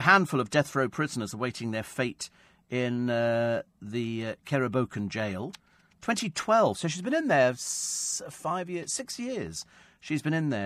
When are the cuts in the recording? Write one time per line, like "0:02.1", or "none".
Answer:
none